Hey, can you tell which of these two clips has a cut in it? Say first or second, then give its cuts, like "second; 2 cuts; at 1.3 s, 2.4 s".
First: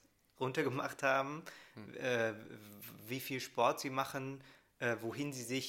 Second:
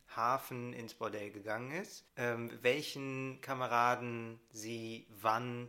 second; 1 cut; at 2.1 s